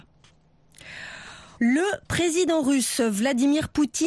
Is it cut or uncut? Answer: cut